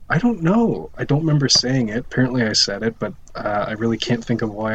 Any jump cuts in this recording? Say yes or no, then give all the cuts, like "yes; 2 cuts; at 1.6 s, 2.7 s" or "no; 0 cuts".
yes; 1 cut; at 0.9 s